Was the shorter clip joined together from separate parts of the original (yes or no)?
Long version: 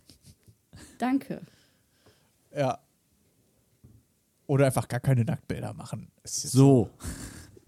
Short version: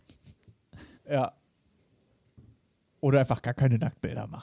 yes